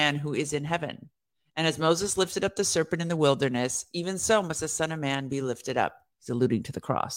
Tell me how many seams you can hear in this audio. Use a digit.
0